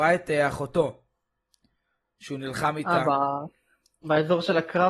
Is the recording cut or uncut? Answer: uncut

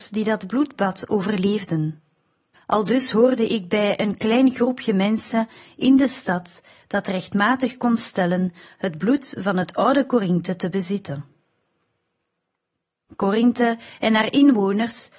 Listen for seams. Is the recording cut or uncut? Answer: cut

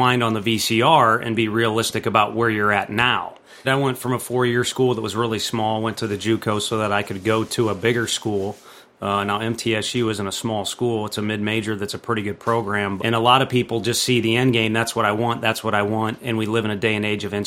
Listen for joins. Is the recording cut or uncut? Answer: cut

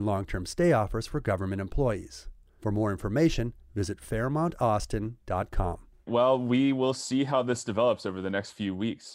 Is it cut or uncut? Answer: cut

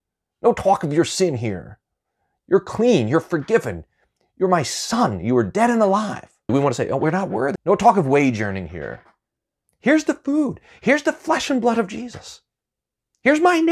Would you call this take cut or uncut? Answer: cut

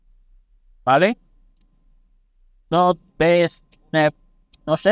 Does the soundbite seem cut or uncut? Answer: uncut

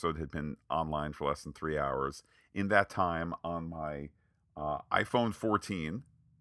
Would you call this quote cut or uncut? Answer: uncut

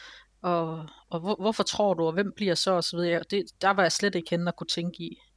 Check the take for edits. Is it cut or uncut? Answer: uncut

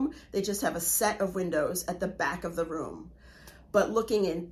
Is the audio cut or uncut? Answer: uncut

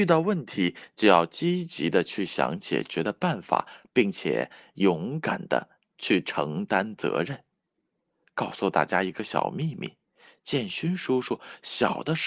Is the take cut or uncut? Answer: uncut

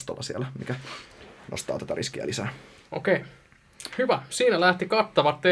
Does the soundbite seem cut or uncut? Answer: uncut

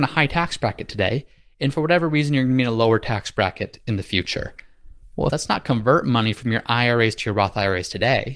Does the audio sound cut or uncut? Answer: cut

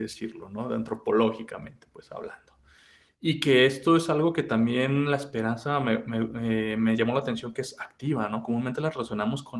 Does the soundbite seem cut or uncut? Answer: uncut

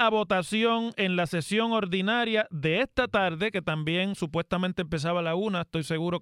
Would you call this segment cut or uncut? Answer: uncut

